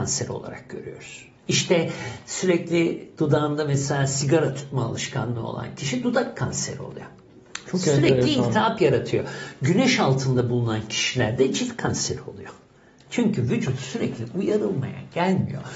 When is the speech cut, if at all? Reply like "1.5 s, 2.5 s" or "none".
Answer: none